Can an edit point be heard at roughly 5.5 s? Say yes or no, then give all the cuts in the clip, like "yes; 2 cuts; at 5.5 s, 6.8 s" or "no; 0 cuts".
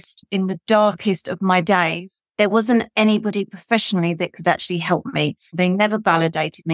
yes; 1 cut; at 5.5 s